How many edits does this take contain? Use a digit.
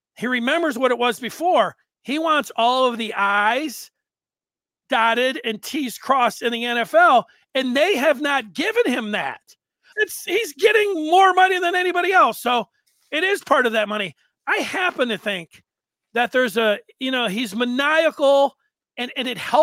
1